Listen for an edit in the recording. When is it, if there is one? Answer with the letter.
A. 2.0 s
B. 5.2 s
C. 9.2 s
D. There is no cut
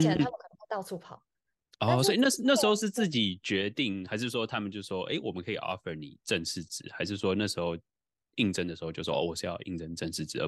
D